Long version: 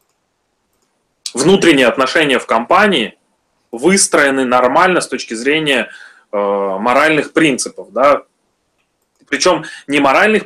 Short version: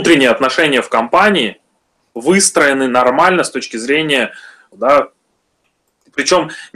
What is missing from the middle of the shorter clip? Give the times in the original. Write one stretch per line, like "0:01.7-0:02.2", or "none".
0:06.3-0:07.9